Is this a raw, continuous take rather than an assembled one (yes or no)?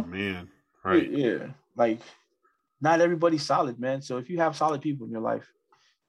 yes